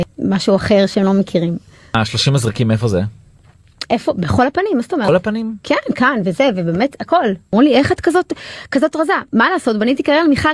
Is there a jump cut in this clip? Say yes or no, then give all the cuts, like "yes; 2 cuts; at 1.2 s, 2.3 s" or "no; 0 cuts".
no; 0 cuts